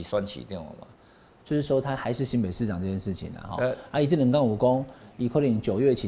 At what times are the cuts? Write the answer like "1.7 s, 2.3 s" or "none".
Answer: 1.4 s